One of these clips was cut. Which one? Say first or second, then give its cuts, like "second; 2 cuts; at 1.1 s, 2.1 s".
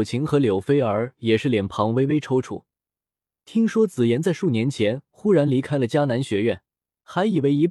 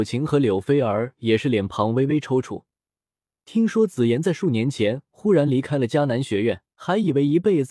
second; 1 cut; at 6.7 s